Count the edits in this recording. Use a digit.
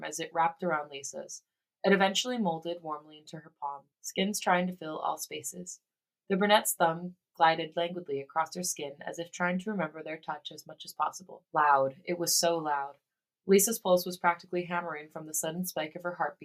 2